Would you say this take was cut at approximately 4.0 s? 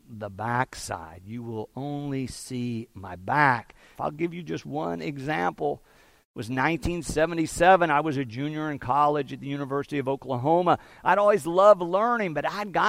yes; 1 cut; at 4.0 s

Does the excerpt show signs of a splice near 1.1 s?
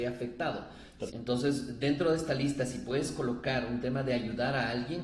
yes; 1 cut; at 1.1 s

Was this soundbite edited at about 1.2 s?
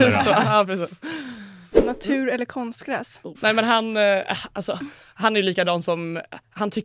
no; 1 cut; at 3.3 s

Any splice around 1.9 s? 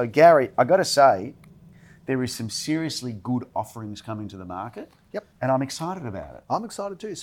no; 1 cut; at 5.3 s

